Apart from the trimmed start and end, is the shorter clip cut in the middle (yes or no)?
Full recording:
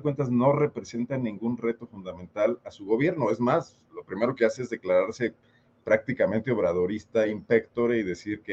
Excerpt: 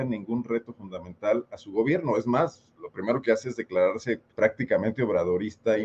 yes